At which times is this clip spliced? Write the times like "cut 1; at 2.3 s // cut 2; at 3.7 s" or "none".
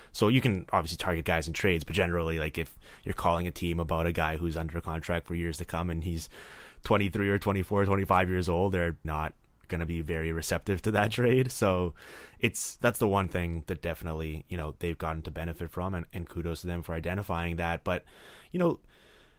cut 1; at 9.0 s // cut 2; at 12.8 s